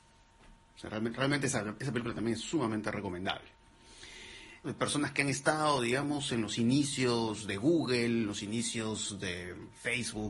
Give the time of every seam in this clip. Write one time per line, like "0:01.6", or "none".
0:04.6